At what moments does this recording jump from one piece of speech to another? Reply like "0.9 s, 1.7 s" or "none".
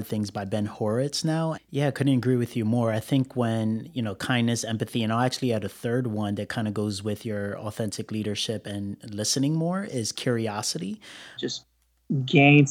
1.5 s, 11.4 s